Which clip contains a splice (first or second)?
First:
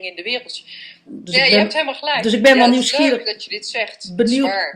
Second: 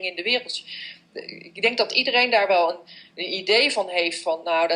first